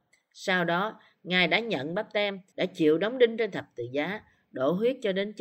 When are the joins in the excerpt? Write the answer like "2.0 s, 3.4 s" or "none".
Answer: 2.5 s